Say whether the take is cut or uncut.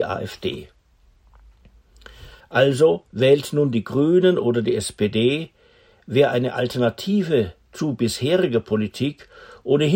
cut